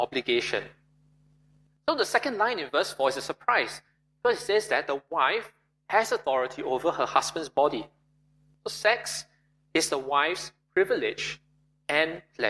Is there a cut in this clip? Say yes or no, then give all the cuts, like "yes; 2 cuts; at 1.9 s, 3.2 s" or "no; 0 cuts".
no; 0 cuts